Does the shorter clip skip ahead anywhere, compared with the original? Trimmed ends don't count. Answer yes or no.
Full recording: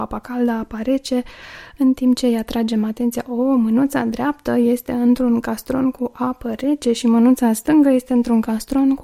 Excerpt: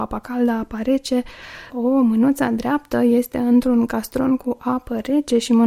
yes